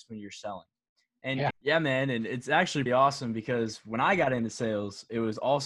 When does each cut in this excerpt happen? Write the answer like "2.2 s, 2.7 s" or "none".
1.5 s, 2.9 s